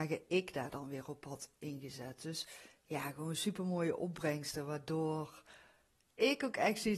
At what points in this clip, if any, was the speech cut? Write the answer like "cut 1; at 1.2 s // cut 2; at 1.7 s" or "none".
none

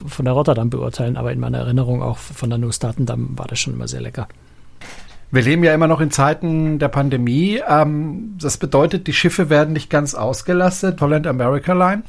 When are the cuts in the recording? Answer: cut 1; at 11.0 s

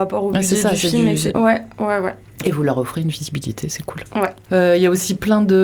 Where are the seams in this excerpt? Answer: cut 1; at 1.3 s

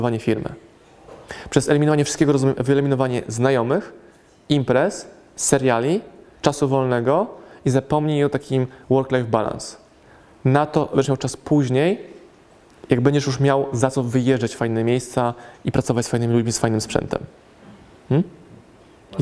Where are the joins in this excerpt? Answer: none

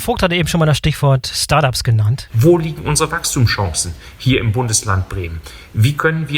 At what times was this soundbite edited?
cut 1; at 2.3 s

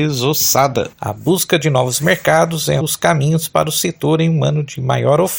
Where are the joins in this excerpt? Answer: cut 1; at 0.9 s // cut 2; at 2.8 s

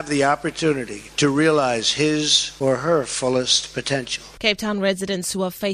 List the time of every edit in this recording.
cut 1; at 4.4 s

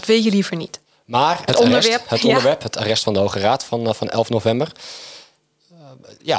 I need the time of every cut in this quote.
cut 1; at 1.5 s

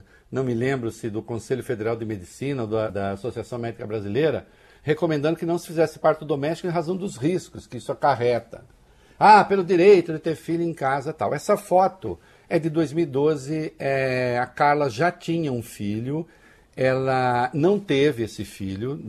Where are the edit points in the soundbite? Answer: cut 1; at 2.9 s

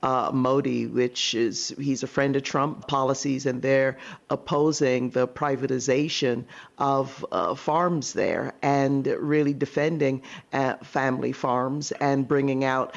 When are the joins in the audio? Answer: cut 1; at 2.8 s

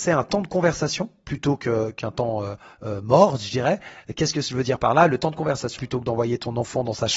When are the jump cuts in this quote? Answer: cut 1; at 5.8 s

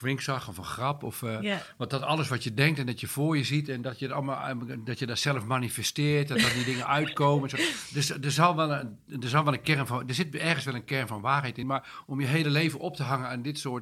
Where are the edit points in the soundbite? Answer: none

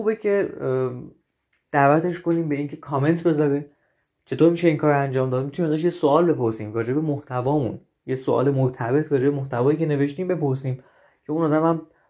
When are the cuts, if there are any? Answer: none

